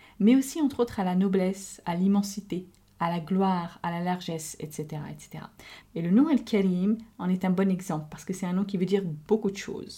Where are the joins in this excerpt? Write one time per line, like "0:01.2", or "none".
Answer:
0:05.8

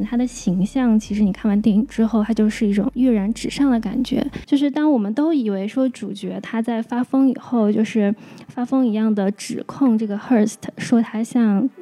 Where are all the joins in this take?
0:04.4

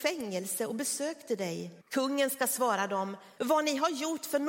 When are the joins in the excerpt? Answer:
0:01.8
0:03.4

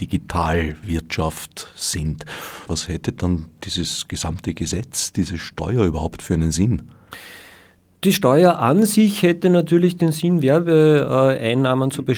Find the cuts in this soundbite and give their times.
0:02.7

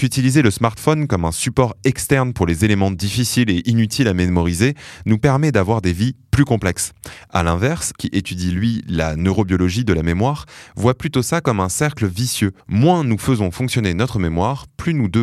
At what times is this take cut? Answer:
0:08.0
0:12.6

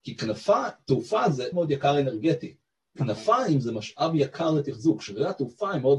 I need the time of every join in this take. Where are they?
0:01.5

